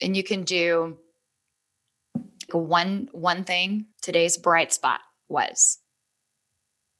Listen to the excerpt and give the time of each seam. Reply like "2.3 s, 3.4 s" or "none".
2.5 s, 3.9 s